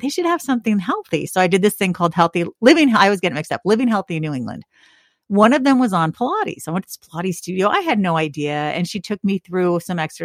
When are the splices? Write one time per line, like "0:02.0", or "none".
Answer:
none